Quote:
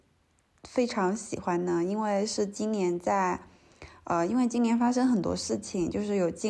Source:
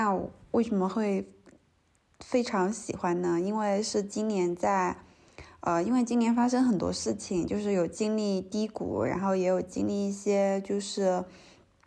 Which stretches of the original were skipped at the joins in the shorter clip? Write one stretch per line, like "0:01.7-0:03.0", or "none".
none